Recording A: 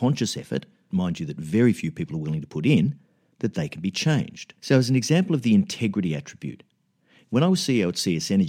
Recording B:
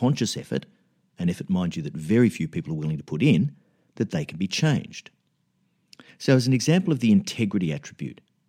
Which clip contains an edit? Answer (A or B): A